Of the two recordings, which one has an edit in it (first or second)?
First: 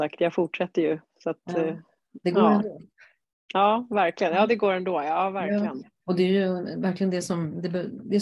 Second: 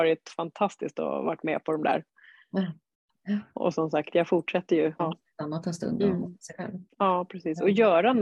second